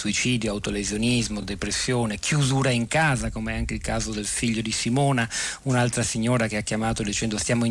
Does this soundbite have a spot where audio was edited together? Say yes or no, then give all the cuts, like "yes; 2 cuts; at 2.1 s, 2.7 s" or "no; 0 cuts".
no; 0 cuts